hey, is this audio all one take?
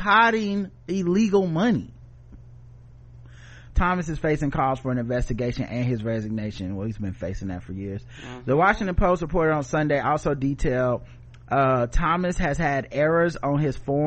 no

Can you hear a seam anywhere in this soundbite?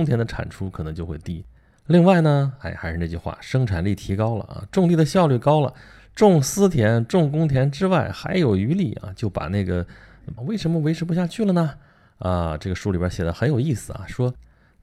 yes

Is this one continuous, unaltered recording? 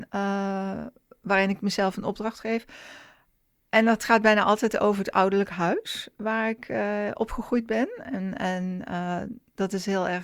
yes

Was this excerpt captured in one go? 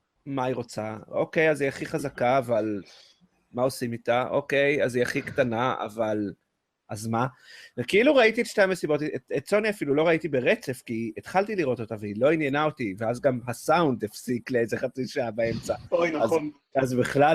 yes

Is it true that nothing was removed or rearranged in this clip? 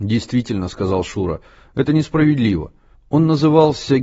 no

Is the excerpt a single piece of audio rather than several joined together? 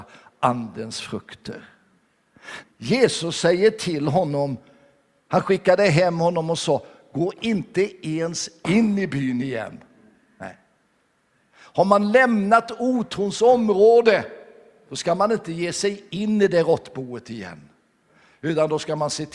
no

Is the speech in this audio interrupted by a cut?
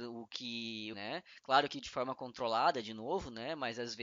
yes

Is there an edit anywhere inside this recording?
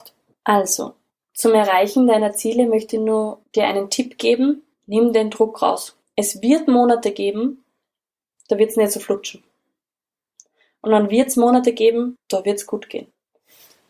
no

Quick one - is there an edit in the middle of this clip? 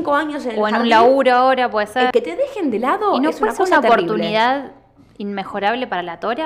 yes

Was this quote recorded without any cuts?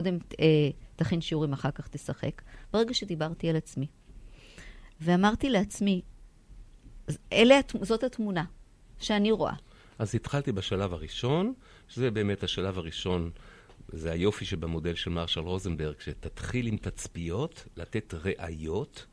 yes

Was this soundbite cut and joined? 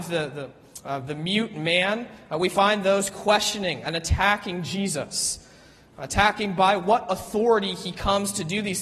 no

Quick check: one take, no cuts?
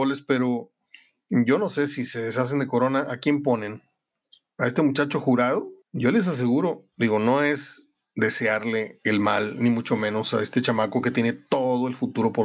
no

